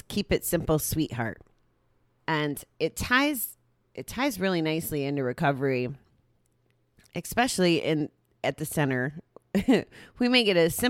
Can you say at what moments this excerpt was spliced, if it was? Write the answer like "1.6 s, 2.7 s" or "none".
2.2 s